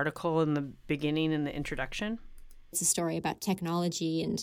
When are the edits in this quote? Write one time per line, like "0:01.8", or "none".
0:02.7